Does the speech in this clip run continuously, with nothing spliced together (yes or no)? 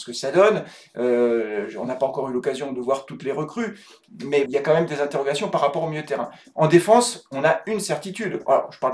no